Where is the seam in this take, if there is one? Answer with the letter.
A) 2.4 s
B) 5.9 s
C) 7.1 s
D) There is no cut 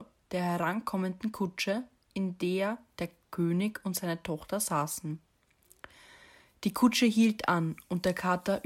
D